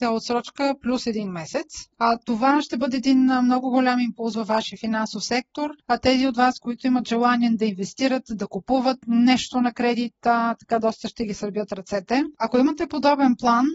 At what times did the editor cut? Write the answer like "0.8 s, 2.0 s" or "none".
1.9 s

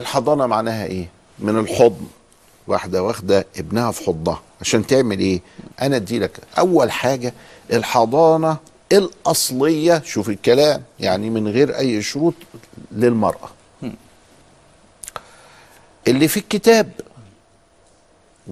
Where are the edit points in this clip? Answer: 5.7 s, 16.0 s

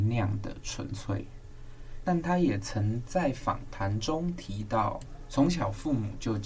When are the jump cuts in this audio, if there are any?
2.0 s

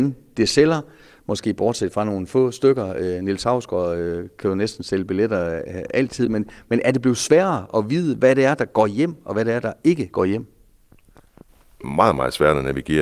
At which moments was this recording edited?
none

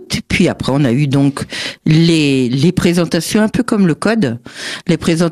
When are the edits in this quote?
none

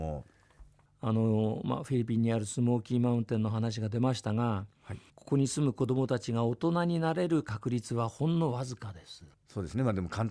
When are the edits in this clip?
5.1 s, 9.3 s

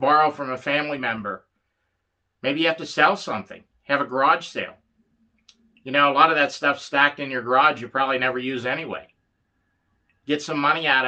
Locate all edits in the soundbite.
none

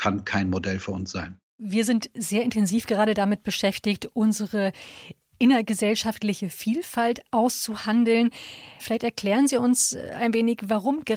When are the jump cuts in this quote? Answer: 8.8 s

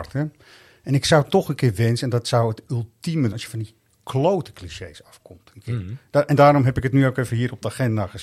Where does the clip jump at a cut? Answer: 3.3 s

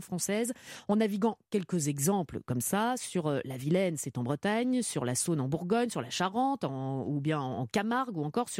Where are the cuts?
none

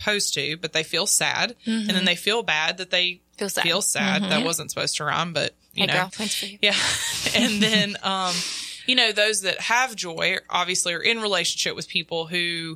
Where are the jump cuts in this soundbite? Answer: 6.1 s

